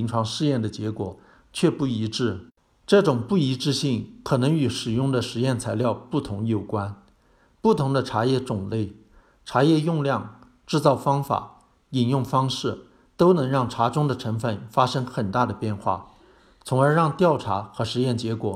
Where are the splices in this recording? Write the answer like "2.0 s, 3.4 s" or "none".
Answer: none